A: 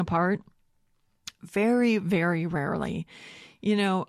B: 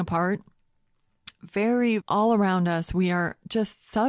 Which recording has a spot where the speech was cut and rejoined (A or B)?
B